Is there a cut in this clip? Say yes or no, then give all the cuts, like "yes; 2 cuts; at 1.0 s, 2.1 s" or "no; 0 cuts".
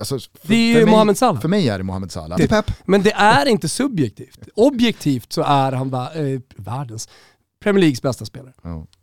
yes; 1 cut; at 2.4 s